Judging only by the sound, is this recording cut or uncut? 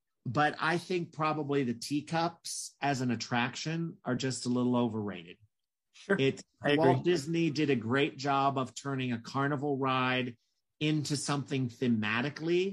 uncut